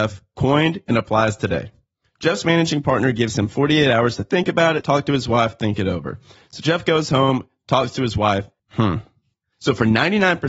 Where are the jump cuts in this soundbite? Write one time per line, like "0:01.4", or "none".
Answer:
0:04.8
0:08.6